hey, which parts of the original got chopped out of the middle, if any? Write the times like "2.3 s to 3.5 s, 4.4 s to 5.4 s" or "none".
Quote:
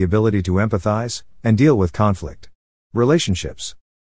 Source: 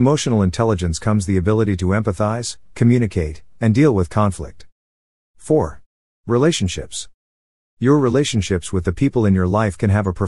2.7 s to 3.6 s, 5.0 s to 6.2 s